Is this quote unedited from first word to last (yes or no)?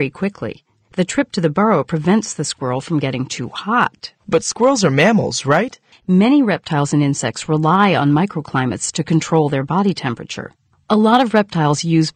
no